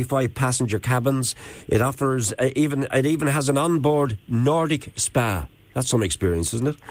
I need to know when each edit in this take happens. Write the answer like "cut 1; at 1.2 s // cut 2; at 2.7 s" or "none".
none